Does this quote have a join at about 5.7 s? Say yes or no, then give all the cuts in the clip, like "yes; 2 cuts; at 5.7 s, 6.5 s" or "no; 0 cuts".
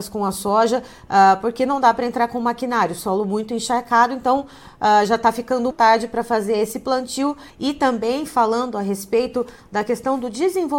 yes; 2 cuts; at 5.7 s, 7.5 s